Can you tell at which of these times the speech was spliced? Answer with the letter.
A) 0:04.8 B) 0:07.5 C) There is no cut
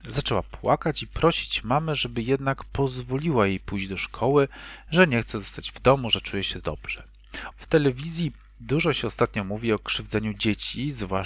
B